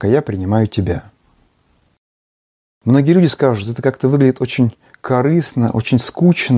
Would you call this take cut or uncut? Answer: uncut